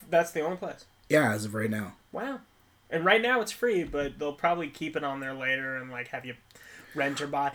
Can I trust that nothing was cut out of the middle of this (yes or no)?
yes